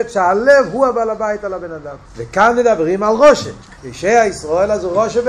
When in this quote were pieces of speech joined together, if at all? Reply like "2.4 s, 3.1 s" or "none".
2.0 s, 3.8 s